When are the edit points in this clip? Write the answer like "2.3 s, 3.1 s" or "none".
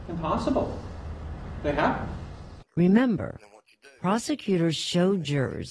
2.6 s